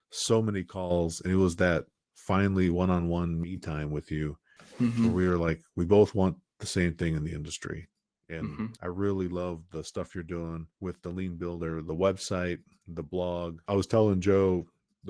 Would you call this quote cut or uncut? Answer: cut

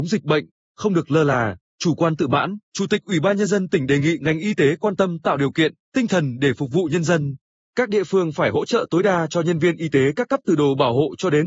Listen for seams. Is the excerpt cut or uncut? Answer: cut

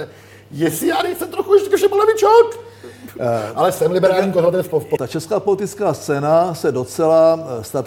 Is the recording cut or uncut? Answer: cut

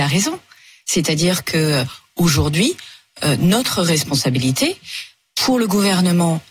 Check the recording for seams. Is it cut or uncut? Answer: uncut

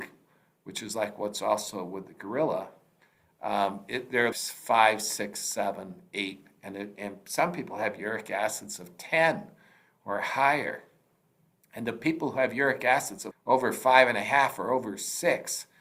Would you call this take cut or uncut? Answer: cut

